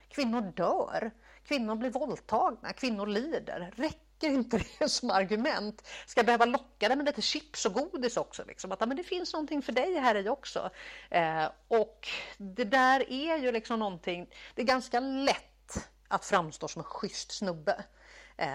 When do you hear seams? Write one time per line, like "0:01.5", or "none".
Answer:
none